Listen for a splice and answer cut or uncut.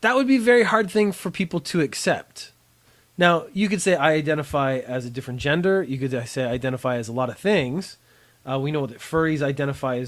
uncut